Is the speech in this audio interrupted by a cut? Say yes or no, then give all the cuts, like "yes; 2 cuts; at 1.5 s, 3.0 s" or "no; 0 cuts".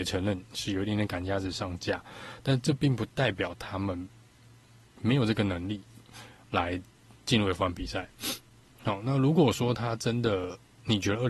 no; 0 cuts